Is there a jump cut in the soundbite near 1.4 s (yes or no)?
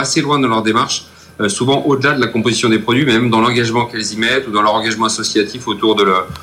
no